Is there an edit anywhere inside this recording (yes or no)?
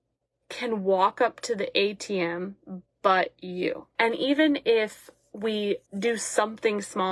yes